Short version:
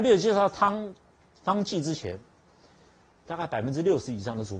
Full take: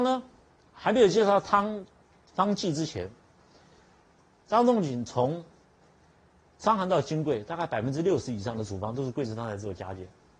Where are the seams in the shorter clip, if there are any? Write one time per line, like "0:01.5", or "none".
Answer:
0:03.2